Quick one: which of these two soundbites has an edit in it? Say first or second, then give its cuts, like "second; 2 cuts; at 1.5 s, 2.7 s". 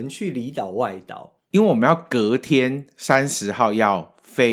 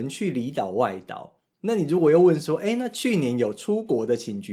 first; 1 cut; at 1.5 s